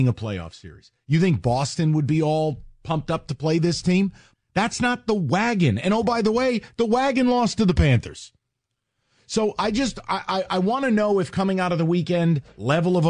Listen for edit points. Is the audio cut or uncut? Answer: cut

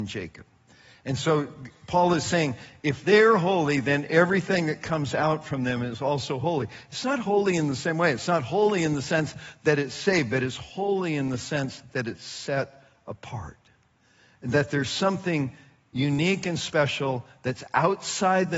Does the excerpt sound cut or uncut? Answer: uncut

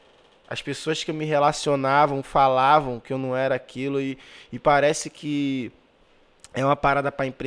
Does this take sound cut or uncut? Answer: uncut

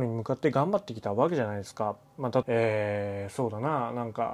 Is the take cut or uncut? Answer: cut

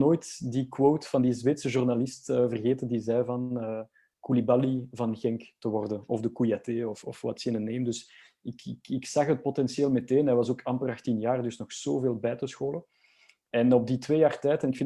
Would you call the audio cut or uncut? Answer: cut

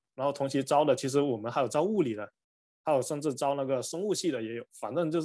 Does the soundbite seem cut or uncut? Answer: uncut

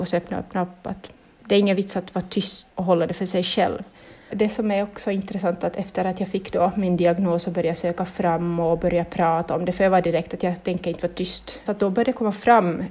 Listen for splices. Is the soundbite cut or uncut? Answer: cut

